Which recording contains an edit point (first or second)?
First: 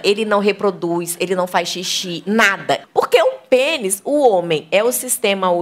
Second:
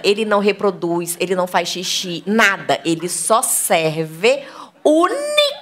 first